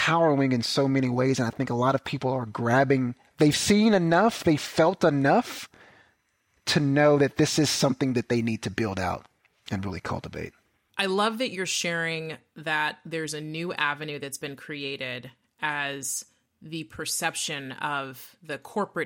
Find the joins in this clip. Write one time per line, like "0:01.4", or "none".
none